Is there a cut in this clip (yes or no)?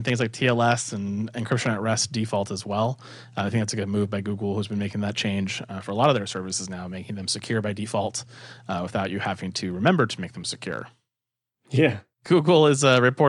no